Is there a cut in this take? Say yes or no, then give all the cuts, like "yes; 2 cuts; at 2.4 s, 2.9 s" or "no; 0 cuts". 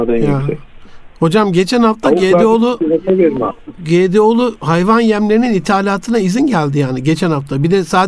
no; 0 cuts